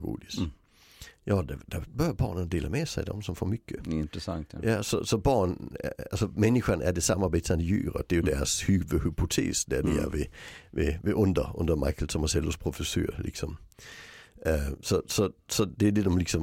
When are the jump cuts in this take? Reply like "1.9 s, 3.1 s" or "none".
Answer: none